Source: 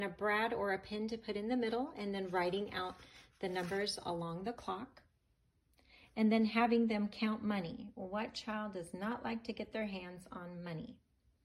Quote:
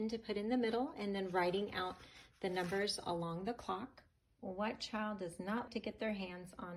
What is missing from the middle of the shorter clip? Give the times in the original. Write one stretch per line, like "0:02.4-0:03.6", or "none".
0:05.4-0:07.9
0:09.2-0:09.4

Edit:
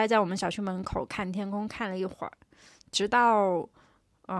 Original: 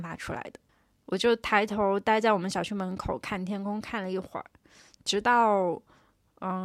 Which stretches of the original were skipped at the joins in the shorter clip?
none

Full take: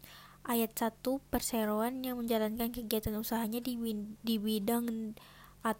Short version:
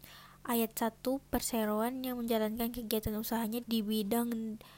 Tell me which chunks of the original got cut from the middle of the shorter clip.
0:03.6-0:04.2

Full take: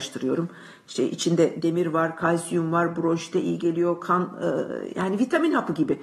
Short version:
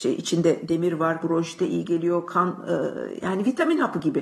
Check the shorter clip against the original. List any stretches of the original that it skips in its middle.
0:02.1-0:02.9

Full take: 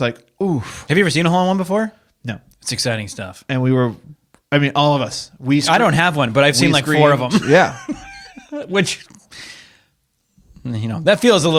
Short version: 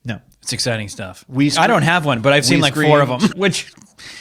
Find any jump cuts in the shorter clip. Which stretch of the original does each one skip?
0:03.5-0:05.4
0:07.4-0:08.6

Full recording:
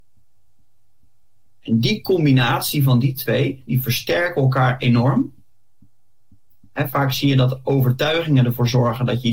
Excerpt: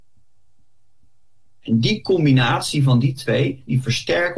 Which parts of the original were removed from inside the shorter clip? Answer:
none

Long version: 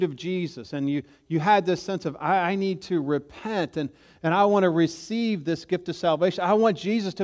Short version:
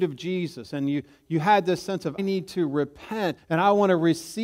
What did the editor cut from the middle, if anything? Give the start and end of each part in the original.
0:02.2-0:02.5
0:03.7-0:04.1

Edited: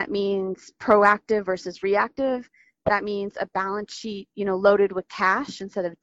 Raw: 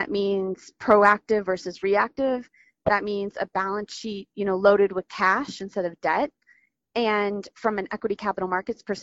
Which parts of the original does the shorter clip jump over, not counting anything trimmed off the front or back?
none

